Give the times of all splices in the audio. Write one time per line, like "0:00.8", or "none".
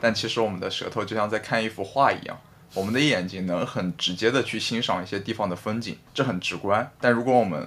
0:06.1

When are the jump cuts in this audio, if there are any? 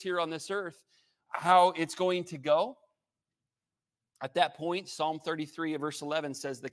0:01.3

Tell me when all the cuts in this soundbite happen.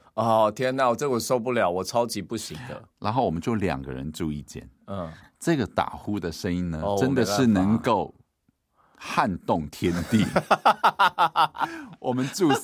none

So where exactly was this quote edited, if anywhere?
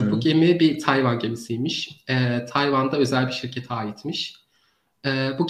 none

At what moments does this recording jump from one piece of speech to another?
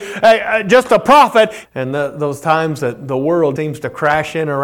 0:01.6
0:03.6

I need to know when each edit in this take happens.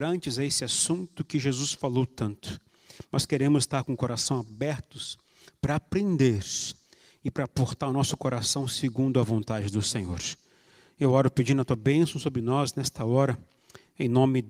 none

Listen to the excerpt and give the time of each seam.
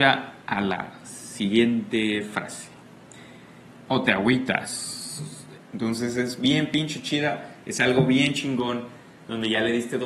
0:03.7
0:05.6

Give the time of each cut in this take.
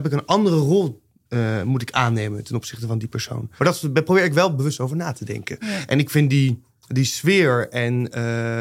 0:03.6
0:05.6

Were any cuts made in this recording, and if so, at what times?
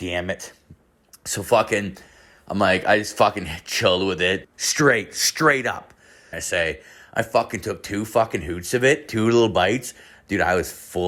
0:04.4
0:06.3

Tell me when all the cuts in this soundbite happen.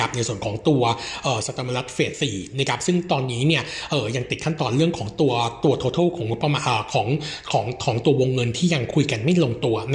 0:02.1

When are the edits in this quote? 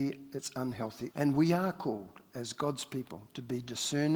0:01.1

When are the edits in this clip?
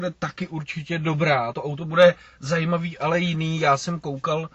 none

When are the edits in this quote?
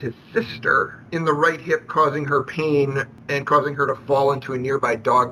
0:01.1

